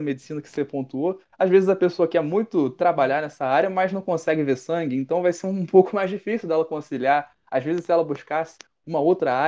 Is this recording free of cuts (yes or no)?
yes